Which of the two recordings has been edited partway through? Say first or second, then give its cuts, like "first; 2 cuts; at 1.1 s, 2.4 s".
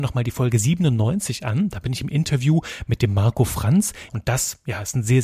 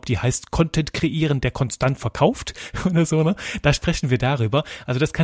first; 1 cut; at 4.1 s